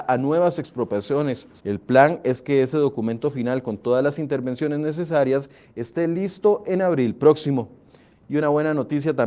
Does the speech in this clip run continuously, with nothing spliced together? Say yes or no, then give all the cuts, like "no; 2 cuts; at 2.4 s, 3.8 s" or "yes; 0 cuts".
no; 1 cut; at 1.6 s